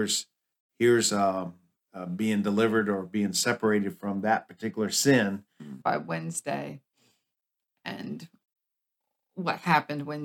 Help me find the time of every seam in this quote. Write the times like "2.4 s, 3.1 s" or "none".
5.8 s